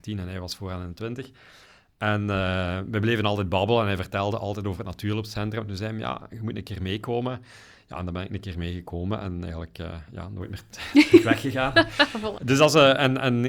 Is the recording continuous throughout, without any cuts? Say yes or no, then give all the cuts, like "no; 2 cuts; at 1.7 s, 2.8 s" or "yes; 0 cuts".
no; 1 cut; at 12.4 s